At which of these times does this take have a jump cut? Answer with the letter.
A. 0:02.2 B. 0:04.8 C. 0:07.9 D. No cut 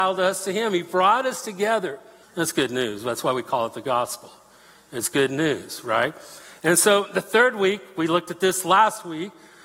A